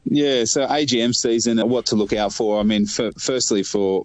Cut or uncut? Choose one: cut